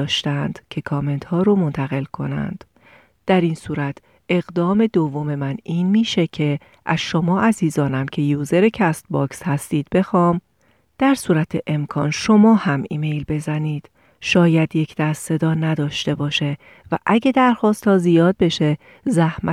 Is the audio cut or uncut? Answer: uncut